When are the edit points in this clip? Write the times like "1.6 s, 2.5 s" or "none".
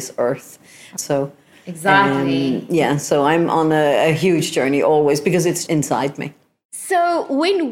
1.0 s, 5.7 s